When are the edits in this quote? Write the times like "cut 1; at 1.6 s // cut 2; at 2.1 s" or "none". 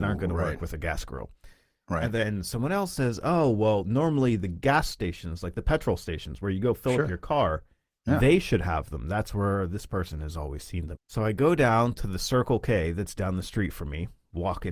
cut 1; at 11.0 s

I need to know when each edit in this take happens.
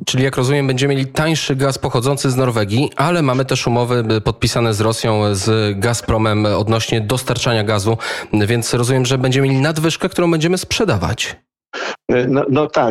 none

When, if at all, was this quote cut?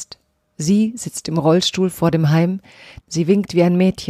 cut 1; at 3.0 s

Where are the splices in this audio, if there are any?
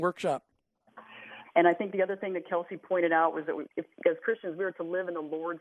cut 1; at 1.4 s // cut 2; at 3.7 s

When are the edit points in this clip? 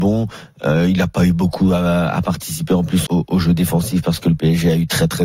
cut 1; at 3.1 s

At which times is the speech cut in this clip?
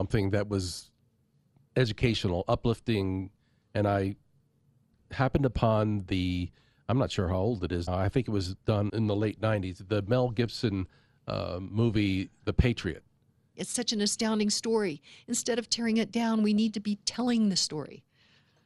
cut 1; at 7.9 s // cut 2; at 8.9 s // cut 3; at 13.6 s

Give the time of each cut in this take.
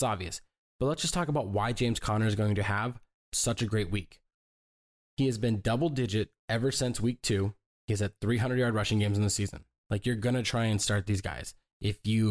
cut 1; at 9.8 s

